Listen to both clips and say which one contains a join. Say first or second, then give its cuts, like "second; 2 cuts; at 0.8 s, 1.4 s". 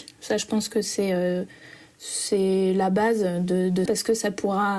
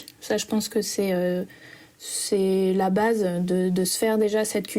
first; 1 cut; at 3.9 s